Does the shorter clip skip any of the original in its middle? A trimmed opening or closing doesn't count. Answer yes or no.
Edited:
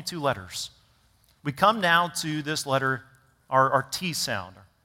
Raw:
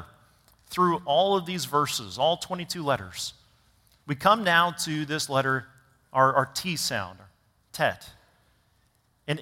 no